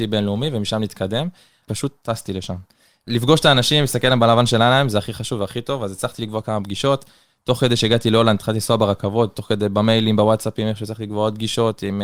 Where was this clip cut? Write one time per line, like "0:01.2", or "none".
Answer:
none